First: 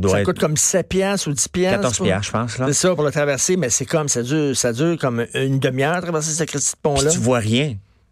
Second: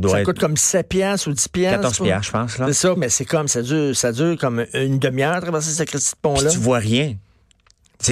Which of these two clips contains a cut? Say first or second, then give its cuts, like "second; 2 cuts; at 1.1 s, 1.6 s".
second; 1 cut; at 3.0 s